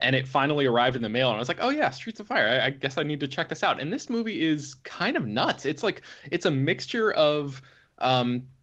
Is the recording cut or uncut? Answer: uncut